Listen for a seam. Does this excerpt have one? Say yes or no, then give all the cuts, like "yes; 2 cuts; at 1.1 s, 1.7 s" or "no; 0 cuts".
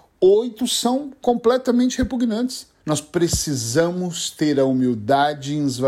yes; 1 cut; at 2.8 s